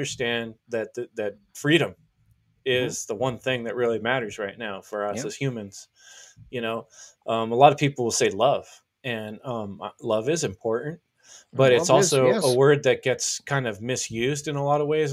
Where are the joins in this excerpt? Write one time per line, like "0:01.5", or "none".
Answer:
none